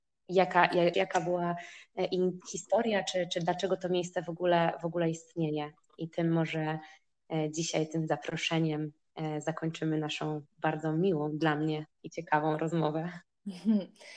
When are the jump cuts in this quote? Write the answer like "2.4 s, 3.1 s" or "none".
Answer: 0.9 s, 2.4 s